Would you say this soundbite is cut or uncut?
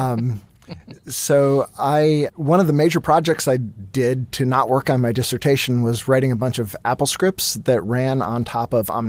cut